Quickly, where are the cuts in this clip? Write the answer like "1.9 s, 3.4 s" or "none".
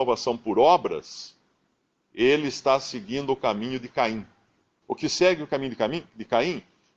4.8 s